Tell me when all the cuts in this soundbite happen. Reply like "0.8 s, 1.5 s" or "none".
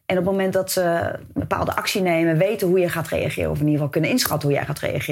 none